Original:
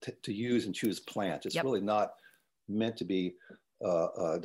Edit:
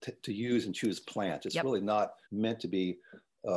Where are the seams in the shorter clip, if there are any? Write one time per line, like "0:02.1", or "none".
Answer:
0:02.2